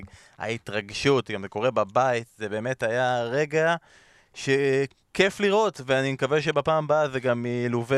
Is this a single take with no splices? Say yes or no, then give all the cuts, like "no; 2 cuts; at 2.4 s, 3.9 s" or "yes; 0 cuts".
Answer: yes; 0 cuts